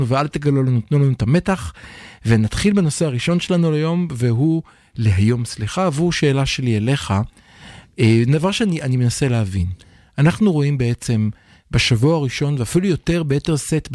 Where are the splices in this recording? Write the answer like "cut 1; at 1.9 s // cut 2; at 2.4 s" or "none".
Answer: none